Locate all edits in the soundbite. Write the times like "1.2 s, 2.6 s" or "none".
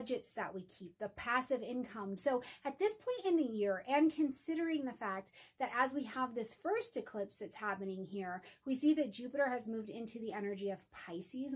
2.2 s